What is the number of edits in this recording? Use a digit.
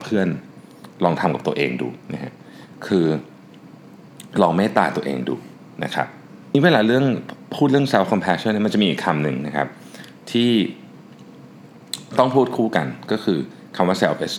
2